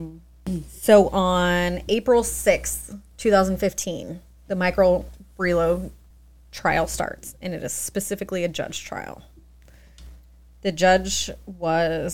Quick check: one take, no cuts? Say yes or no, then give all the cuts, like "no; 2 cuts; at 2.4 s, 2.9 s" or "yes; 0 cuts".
yes; 0 cuts